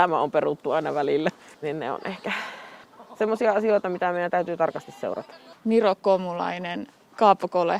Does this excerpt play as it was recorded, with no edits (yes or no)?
no